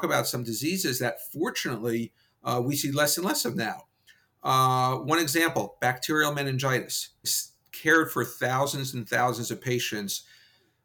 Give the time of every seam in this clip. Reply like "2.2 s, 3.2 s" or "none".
7.2 s

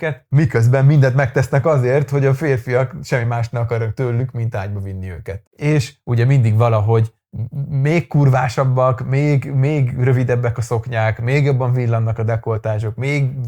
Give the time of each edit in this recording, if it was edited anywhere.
5.4 s

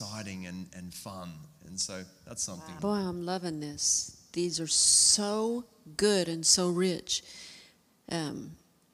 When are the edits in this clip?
2.8 s

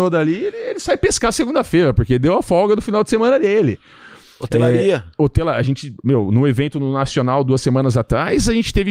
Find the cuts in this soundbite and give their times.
none

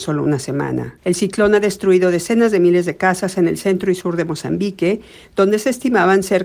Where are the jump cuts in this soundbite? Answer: 1.0 s

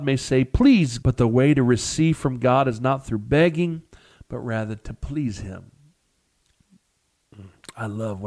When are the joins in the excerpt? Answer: 1.0 s

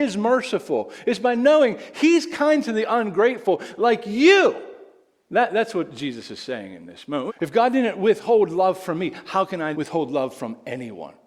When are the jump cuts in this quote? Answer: 7.3 s, 9.7 s

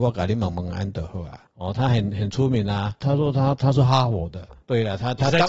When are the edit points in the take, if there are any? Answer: 1.5 s

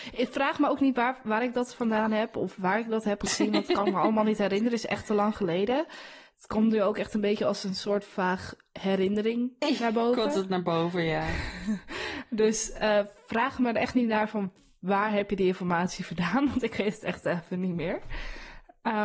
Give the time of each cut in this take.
none

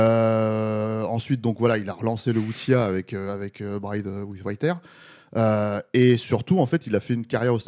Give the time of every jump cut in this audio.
none

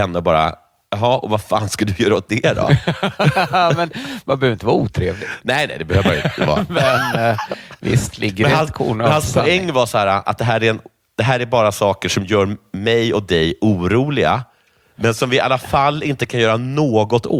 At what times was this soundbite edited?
none

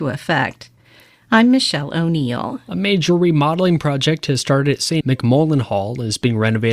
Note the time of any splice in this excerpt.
5.0 s

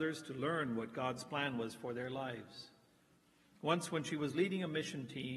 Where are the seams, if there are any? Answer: none

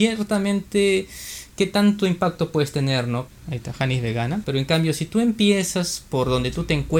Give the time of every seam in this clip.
3.3 s, 4.4 s

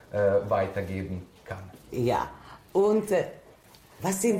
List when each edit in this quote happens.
1.8 s

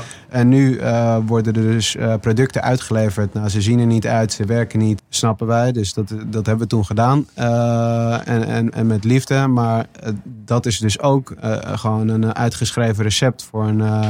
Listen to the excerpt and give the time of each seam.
5.0 s

